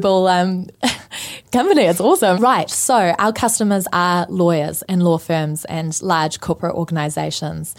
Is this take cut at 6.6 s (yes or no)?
no